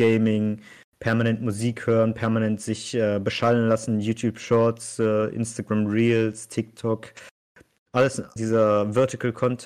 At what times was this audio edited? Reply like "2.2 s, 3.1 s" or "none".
8.4 s